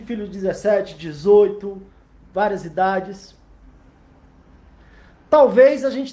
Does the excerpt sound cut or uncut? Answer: uncut